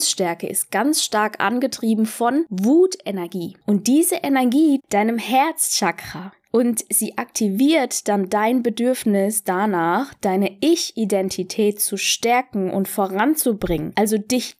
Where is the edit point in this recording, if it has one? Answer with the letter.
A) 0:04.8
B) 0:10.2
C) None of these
A